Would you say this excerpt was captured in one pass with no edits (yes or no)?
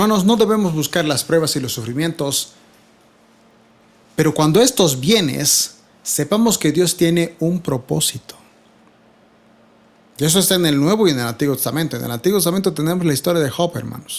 yes